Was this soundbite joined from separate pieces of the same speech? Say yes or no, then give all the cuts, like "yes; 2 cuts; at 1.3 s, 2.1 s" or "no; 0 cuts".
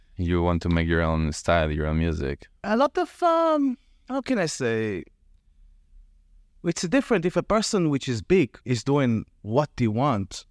yes; 1 cut; at 8.6 s